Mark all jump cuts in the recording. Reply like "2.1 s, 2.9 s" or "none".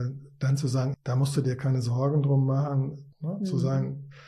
0.9 s, 3.1 s